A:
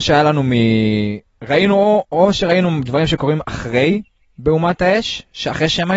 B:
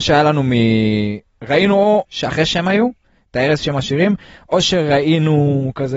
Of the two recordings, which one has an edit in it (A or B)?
B